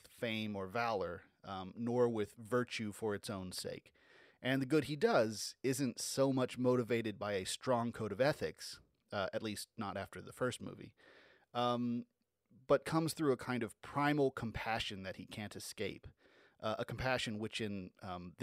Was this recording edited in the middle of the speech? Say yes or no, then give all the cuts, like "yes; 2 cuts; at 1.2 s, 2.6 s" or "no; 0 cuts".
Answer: yes; 1 cut; at 4.3 s